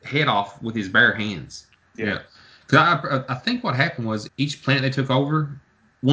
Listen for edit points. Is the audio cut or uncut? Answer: cut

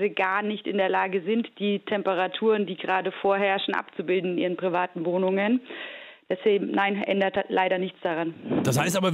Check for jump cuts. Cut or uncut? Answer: uncut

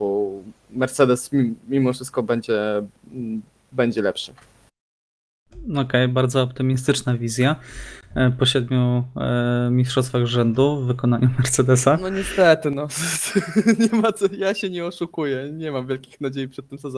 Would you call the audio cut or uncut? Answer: uncut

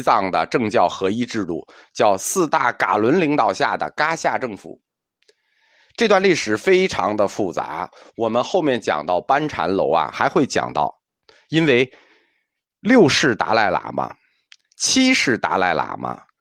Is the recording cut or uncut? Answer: cut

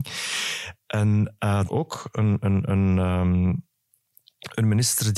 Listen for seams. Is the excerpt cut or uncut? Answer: cut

